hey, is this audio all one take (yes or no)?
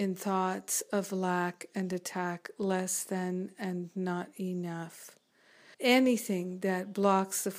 no